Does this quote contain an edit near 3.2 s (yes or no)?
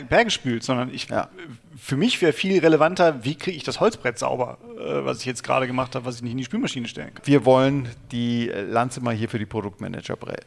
no